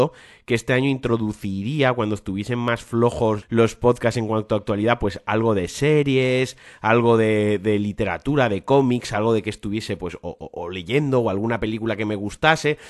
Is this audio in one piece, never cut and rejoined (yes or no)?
no